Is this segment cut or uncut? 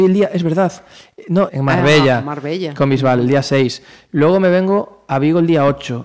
cut